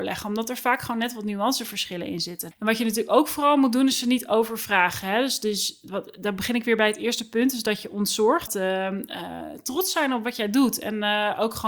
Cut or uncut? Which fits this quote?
cut